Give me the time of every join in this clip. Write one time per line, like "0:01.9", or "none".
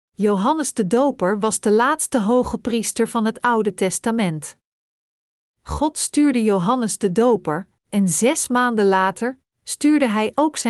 0:07.8